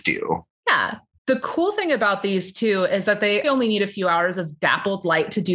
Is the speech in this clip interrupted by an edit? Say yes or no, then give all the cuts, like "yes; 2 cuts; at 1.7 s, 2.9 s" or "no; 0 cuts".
yes; 2 cuts; at 1.2 s, 3.4 s